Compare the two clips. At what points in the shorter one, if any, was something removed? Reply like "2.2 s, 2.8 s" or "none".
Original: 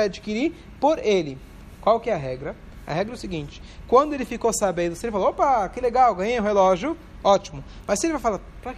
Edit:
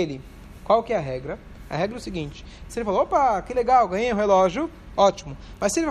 2.7 s